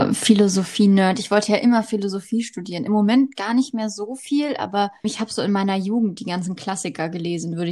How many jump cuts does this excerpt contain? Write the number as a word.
one